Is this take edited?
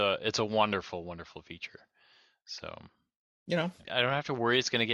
yes; 1 cut; at 3.8 s

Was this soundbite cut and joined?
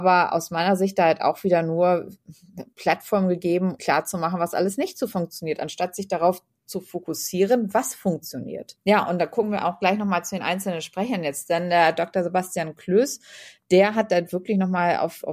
yes; 1 cut; at 3.8 s

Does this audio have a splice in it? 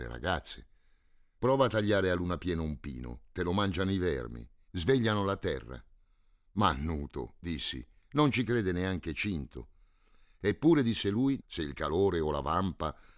yes; 3 cuts; at 1.4 s, 4.7 s, 11.4 s

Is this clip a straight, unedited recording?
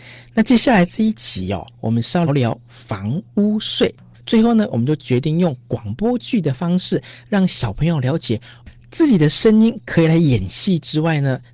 no; 2 cuts; at 2.3 s, 4.1 s

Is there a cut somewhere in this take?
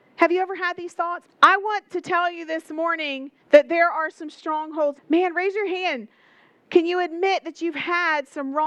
yes; 3 cuts; at 1.3 s, 3.4 s, 5.0 s

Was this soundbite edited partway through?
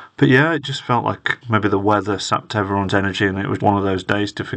yes; 2 cuts; at 1.4 s, 3.6 s

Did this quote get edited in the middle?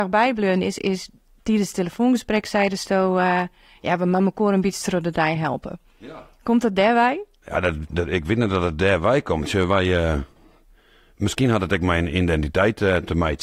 no; 0 cuts

